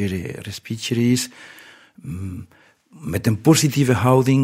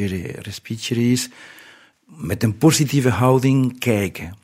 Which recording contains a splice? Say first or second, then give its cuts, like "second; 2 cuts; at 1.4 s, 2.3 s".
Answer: second; 1 cut; at 1.9 s